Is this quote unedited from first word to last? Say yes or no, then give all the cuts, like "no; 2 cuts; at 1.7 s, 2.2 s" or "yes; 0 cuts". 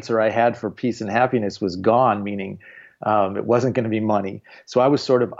yes; 0 cuts